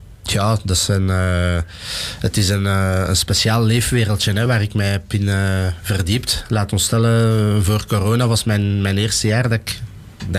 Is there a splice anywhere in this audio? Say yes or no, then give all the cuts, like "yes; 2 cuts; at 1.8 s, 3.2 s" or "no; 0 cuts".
no; 0 cuts